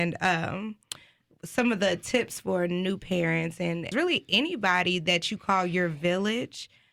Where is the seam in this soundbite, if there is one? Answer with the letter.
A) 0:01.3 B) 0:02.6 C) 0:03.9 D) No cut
C